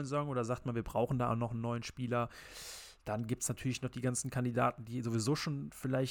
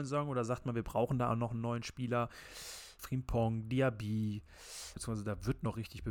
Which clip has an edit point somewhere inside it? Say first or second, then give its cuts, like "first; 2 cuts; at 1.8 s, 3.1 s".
second; 2 cuts; at 3.0 s, 5.0 s